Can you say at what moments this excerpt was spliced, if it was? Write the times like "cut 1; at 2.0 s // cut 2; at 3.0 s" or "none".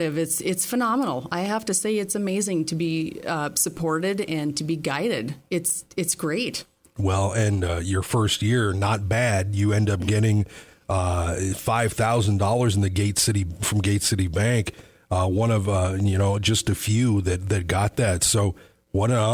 none